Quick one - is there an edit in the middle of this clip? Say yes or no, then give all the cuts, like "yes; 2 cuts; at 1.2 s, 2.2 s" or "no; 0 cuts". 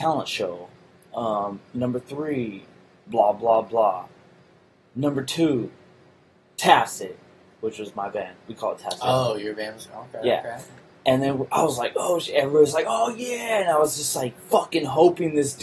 no; 0 cuts